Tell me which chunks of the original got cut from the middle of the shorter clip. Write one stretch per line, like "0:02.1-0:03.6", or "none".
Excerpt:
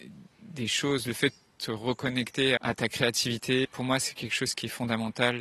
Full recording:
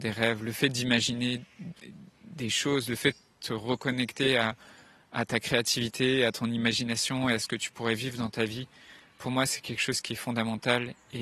0:04.4-0:05.1
0:06.2-0:09.1